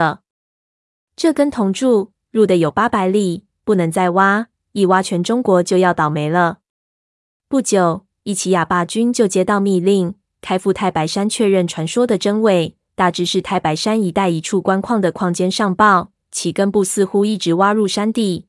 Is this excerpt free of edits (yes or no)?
no